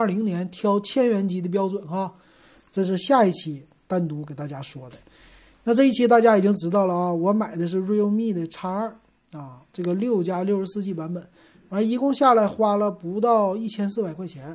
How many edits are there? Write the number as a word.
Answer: one